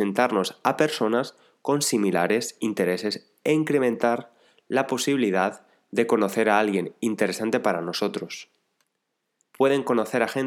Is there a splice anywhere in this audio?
yes; 1 cut; at 9.5 s

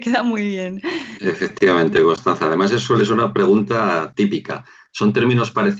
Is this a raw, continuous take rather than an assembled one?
no; 1 cut; at 1.2 s

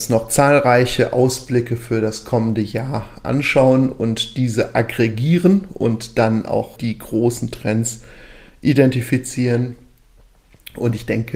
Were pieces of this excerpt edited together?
yes; 1 cut; at 6.8 s

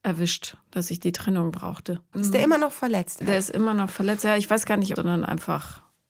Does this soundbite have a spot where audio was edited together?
yes; 3 cuts; at 2.1 s, 3.2 s, 5.0 s

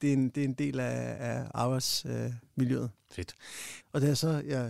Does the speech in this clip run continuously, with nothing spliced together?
no; 1 cut; at 3.8 s

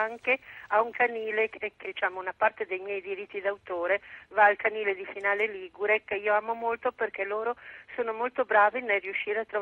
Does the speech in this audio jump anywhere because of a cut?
yes; 1 cut; at 1.8 s

